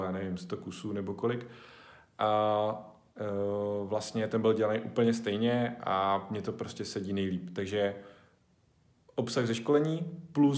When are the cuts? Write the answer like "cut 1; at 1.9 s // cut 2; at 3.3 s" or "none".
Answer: none